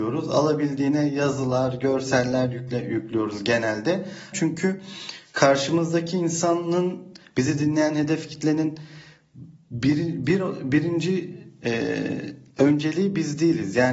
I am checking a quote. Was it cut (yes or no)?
yes